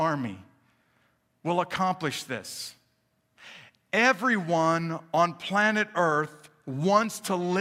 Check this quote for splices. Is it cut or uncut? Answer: uncut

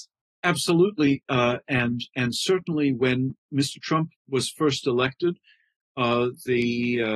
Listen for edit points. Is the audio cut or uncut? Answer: uncut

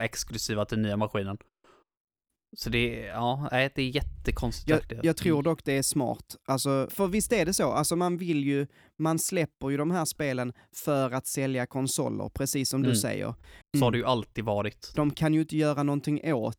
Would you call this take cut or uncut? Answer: cut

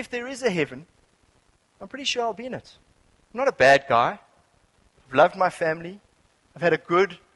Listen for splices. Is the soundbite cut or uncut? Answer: uncut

